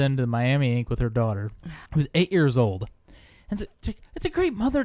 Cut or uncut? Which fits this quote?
cut